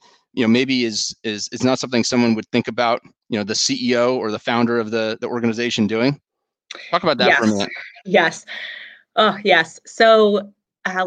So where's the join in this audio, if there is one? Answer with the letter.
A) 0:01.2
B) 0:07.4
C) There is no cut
C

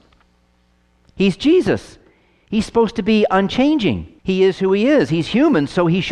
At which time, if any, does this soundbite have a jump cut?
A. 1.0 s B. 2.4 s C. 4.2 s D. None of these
C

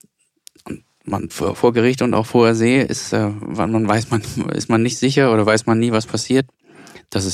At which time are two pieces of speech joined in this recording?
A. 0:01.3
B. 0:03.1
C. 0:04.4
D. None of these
A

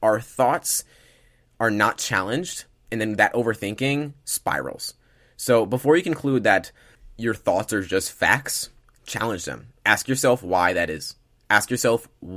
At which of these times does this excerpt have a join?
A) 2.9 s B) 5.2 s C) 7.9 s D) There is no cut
A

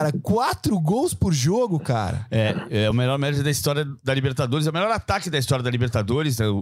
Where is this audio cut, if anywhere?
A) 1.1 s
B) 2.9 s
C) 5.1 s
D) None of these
D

